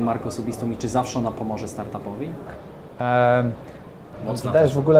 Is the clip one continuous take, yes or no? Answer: no